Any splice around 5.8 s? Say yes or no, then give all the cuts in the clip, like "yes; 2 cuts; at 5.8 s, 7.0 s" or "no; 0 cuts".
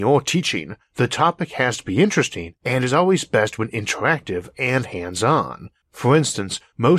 yes; 1 cut; at 5.8 s